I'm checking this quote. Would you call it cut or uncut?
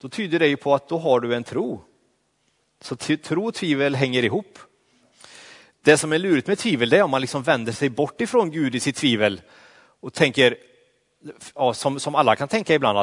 uncut